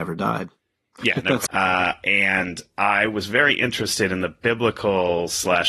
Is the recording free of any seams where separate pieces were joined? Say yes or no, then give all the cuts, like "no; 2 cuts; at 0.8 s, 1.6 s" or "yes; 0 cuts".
no; 1 cut; at 1.5 s